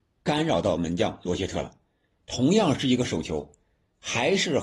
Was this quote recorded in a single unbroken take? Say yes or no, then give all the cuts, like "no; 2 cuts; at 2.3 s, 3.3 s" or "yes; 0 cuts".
no; 1 cut; at 2.1 s